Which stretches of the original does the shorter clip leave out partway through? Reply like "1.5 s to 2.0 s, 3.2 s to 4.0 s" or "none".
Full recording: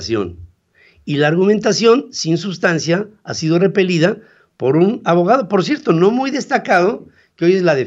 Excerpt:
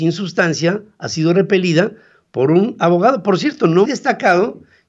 6.1 s to 6.3 s